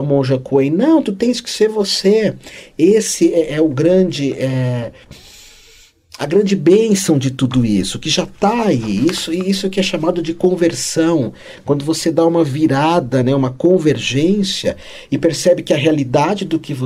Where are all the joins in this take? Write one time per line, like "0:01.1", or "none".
none